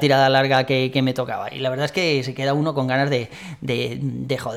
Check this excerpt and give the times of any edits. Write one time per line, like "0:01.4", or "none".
none